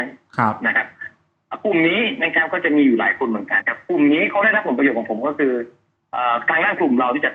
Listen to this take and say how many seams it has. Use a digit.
1